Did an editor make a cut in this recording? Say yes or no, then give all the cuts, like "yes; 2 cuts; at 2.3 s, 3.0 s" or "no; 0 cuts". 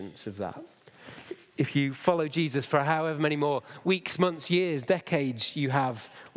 no; 0 cuts